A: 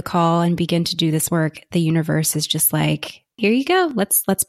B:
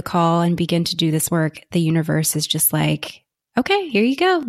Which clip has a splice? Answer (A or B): A